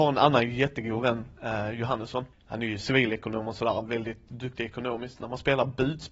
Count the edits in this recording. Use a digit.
0